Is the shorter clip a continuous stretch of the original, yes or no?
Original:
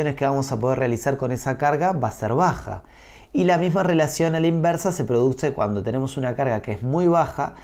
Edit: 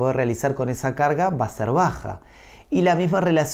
yes